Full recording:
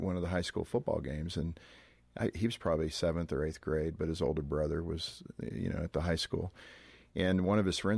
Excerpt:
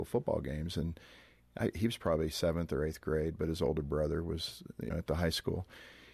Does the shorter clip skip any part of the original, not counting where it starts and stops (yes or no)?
yes